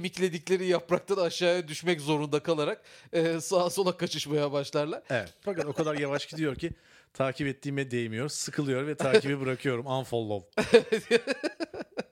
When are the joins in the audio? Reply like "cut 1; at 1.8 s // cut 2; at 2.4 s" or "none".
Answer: cut 1; at 5.5 s

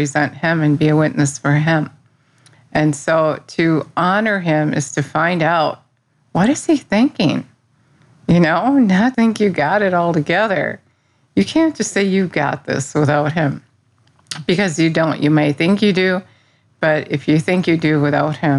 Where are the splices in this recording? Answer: cut 1; at 9.1 s

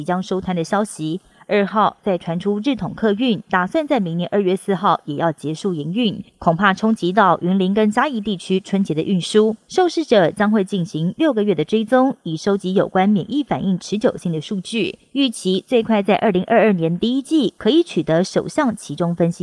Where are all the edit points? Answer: cut 1; at 9.7 s

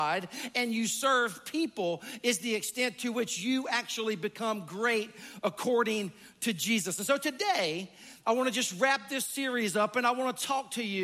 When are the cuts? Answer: none

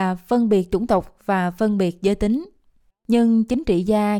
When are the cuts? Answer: cut 1; at 2.9 s

